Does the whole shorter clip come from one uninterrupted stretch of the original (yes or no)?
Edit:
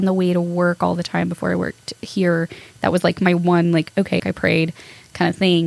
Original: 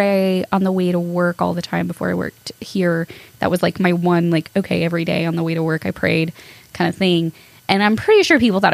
no